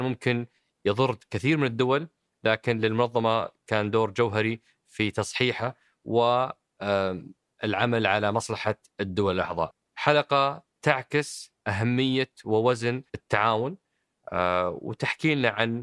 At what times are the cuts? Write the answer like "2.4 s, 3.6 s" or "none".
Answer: 13.1 s